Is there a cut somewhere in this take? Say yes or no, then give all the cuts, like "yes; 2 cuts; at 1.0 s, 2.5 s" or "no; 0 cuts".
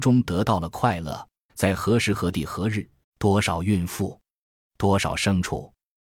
yes; 2 cuts; at 1.5 s, 3.0 s